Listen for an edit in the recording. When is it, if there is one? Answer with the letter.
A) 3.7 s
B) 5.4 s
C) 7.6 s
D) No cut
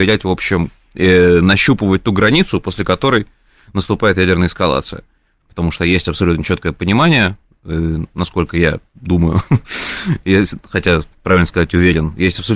B